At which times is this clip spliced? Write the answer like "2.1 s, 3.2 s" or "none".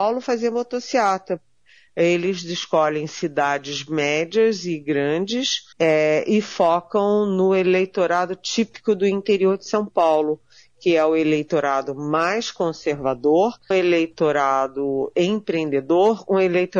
5.7 s, 13.7 s